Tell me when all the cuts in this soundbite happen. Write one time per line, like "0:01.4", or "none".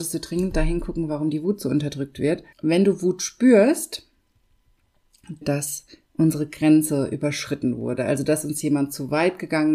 0:02.5
0:05.4